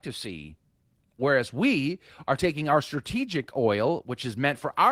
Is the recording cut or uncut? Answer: cut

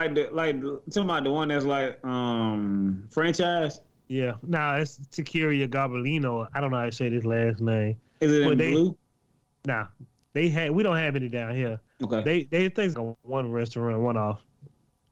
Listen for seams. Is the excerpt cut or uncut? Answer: cut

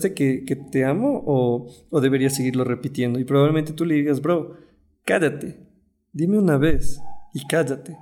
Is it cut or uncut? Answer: uncut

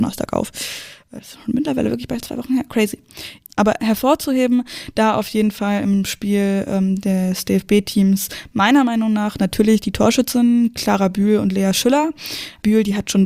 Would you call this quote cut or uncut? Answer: uncut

